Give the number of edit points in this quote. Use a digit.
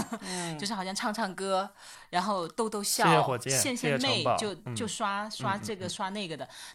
0